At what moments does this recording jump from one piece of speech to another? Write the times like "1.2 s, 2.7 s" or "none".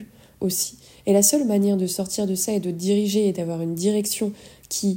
none